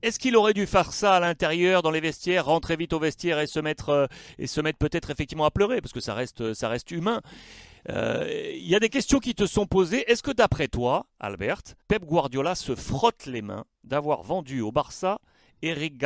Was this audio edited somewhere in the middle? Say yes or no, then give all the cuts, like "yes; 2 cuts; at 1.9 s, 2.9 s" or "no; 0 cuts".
yes; 2 cuts; at 11.8 s, 13.7 s